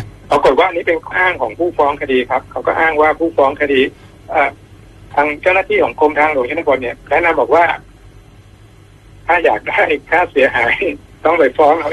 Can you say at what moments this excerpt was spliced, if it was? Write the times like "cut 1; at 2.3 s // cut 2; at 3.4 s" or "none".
cut 1; at 1.1 s